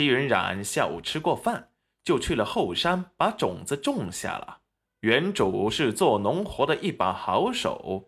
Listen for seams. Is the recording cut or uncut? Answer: cut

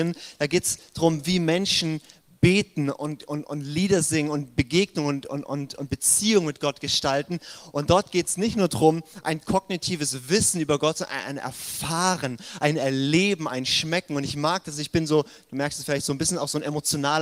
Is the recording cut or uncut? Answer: uncut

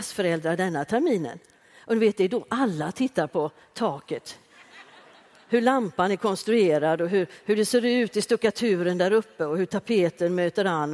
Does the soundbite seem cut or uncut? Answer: uncut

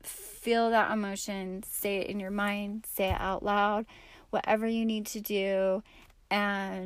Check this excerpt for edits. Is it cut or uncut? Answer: uncut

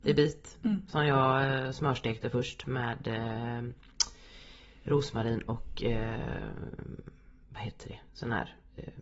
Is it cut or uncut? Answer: uncut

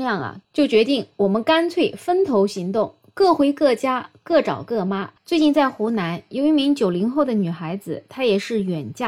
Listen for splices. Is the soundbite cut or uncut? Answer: cut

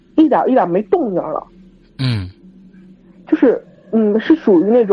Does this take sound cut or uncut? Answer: uncut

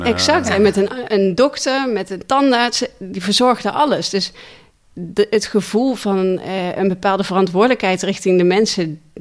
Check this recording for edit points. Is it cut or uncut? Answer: uncut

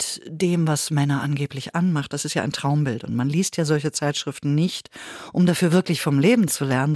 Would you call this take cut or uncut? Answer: uncut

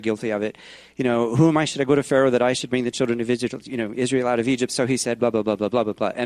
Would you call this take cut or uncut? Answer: uncut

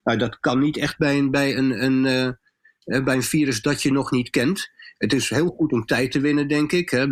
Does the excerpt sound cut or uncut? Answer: uncut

